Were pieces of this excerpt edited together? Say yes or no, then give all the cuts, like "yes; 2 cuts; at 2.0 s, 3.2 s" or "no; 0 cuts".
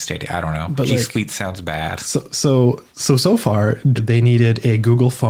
yes; 1 cut; at 3.9 s